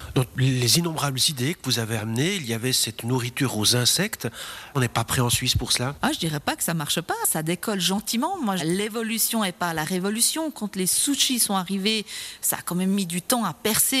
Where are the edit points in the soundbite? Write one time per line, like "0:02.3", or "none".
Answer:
0:08.6